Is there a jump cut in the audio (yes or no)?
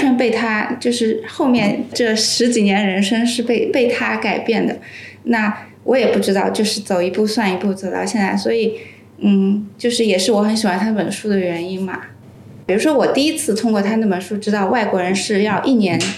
yes